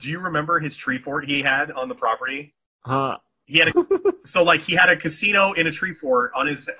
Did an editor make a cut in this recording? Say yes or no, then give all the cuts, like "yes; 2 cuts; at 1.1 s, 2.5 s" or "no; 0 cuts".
yes; 1 cut; at 3.7 s